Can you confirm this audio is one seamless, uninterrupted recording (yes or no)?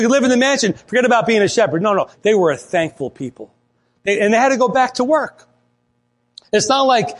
no